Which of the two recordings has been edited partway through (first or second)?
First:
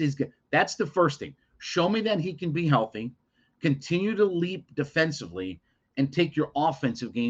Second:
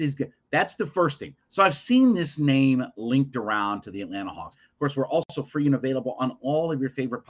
second